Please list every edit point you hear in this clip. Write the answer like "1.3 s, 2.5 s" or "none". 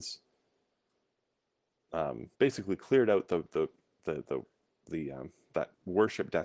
2.3 s